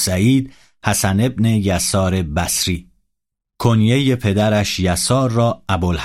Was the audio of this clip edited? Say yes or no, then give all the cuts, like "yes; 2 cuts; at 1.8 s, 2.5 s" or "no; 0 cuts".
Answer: no; 0 cuts